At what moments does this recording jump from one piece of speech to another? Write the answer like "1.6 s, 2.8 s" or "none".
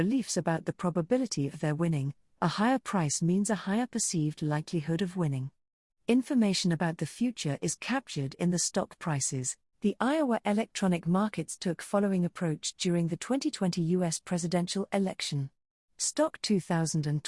5.9 s, 9.7 s